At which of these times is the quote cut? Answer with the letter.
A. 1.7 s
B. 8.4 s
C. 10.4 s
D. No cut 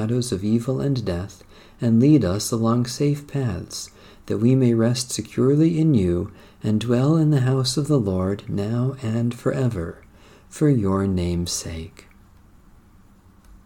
D